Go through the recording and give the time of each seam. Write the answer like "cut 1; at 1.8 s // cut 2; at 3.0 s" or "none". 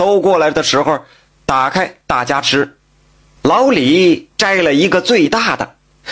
cut 1; at 3.4 s